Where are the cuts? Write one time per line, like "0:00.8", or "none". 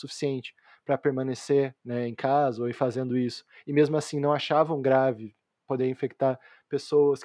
0:01.8